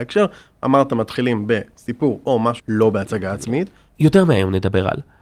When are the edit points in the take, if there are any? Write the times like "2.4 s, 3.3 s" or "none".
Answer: 2.6 s, 3.9 s